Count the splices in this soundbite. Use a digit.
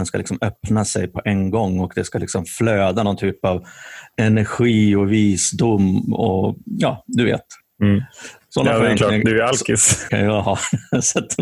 1